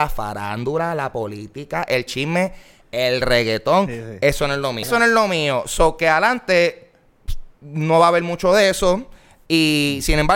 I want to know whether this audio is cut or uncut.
cut